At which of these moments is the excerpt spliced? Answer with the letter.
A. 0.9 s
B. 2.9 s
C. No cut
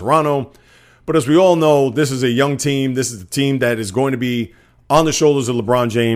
C